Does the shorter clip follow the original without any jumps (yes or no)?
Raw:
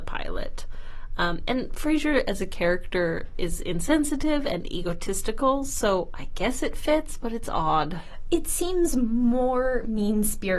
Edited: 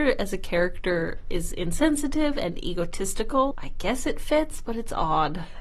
no